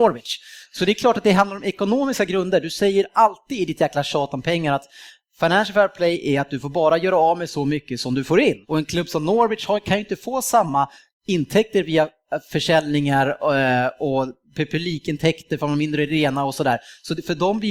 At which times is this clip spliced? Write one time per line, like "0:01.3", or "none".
0:08.6